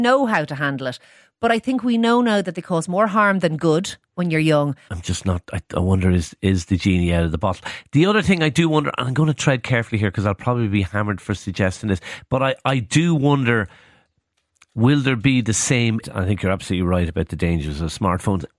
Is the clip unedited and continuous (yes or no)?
no